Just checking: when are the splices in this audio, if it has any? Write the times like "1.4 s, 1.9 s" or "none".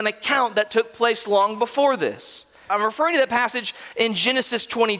2.7 s